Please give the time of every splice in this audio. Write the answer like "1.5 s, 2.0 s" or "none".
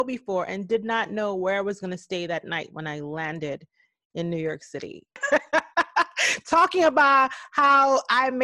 5.2 s